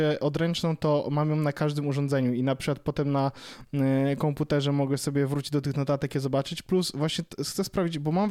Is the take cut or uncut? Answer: uncut